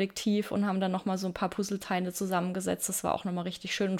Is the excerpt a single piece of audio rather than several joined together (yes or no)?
yes